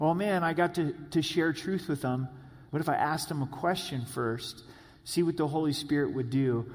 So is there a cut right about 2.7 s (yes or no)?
yes